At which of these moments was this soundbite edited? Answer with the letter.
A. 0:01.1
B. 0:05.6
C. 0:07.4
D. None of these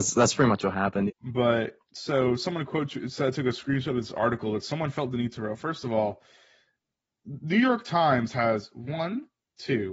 A